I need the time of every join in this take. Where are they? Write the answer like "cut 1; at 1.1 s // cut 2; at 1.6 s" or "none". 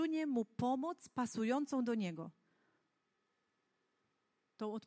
none